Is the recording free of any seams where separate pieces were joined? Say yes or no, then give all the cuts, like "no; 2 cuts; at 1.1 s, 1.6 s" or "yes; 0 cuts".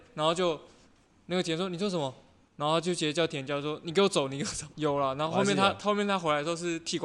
no; 1 cut; at 4.7 s